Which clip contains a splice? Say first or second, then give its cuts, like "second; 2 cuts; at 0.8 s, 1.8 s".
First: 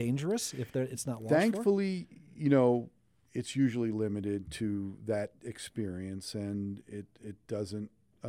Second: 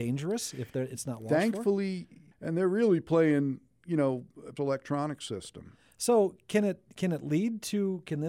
second; 2 cuts; at 2.3 s, 4.6 s